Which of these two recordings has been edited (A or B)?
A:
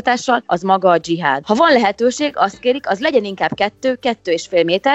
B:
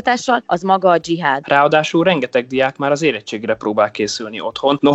A